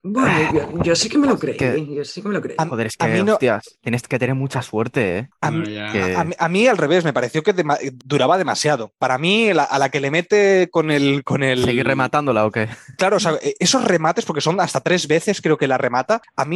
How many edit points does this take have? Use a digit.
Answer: 0